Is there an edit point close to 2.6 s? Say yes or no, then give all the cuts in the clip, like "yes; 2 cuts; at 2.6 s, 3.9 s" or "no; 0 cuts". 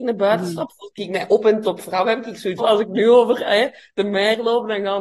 yes; 1 cut; at 2.6 s